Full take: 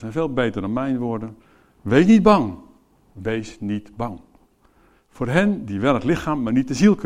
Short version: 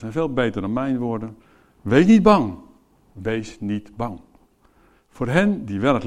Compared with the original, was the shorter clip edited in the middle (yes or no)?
no